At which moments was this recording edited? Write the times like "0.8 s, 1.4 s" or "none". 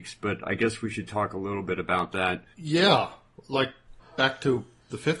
2.5 s, 4.0 s